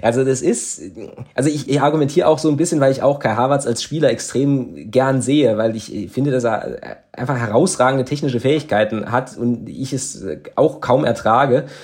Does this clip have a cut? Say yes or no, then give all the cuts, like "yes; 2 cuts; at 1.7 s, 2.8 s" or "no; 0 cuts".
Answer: yes; 1 cut; at 1.7 s